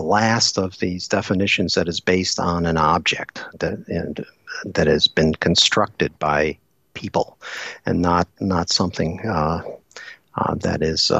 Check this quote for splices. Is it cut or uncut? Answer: uncut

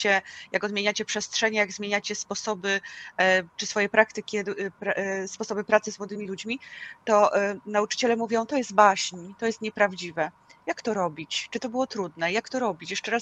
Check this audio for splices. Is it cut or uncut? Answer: uncut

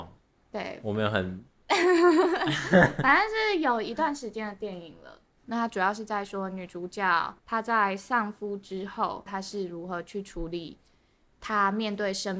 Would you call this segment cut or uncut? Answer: cut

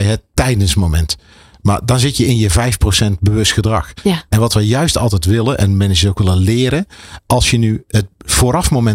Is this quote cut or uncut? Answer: uncut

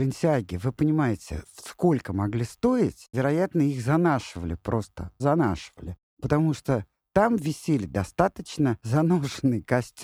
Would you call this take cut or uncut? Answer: cut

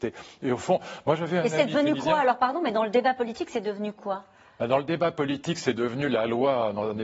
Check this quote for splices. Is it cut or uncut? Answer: uncut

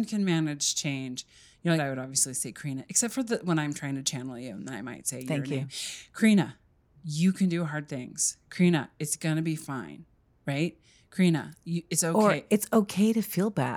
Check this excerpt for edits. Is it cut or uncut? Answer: cut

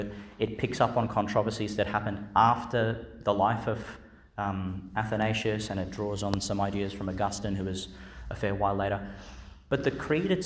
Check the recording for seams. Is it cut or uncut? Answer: uncut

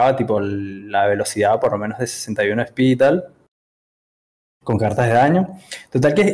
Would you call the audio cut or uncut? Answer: uncut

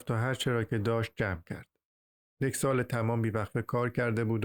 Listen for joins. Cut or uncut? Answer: cut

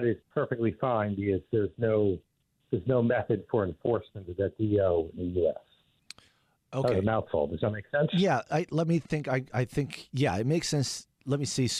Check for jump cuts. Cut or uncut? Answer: uncut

